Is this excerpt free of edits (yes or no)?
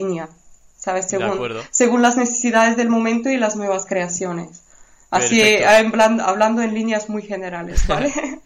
yes